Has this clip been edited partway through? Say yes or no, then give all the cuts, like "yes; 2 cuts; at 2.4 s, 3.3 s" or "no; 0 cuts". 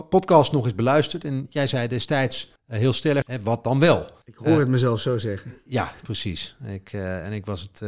yes; 1 cut; at 3.2 s